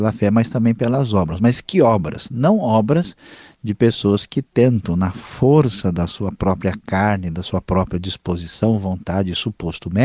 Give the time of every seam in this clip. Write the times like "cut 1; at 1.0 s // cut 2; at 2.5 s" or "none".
none